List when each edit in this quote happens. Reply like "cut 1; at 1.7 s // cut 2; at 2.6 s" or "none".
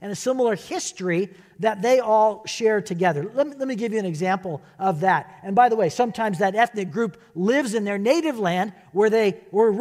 none